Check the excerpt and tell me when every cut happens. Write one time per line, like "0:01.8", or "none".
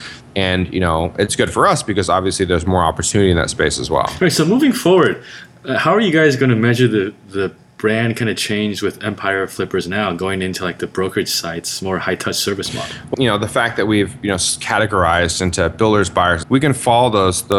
0:13.1
0:16.4